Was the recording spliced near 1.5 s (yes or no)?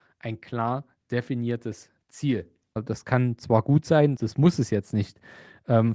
no